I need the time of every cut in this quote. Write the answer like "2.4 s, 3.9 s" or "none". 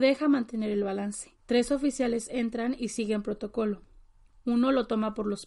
none